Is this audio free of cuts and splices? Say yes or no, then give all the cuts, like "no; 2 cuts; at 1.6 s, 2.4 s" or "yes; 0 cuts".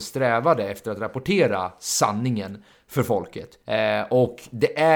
no; 1 cut; at 3.6 s